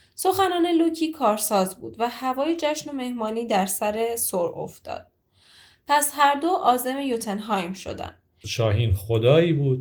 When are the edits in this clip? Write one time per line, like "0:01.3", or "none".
0:08.4

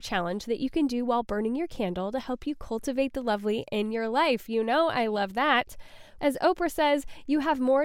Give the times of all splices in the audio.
0:06.2

